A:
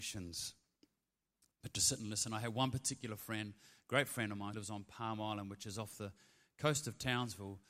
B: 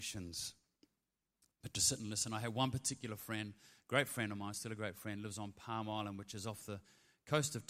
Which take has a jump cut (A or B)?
A